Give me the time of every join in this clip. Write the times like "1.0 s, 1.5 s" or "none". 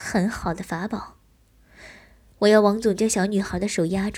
none

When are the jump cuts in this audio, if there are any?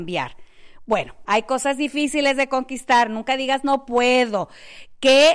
1.2 s

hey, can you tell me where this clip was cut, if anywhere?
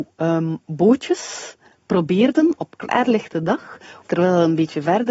4.0 s

